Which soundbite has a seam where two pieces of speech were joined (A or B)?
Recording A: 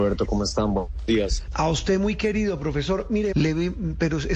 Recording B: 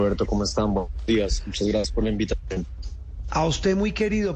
A